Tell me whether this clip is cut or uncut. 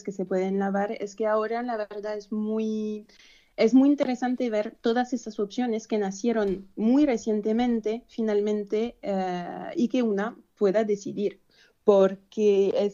uncut